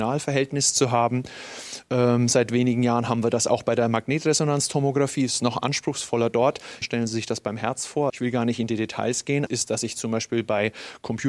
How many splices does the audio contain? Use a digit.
3